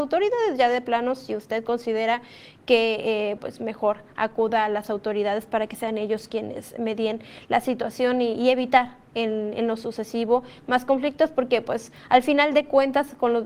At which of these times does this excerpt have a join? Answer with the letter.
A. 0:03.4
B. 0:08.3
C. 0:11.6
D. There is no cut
A